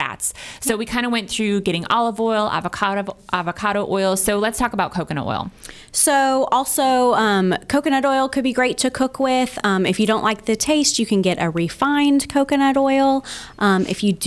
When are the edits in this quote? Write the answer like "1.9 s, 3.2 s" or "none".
none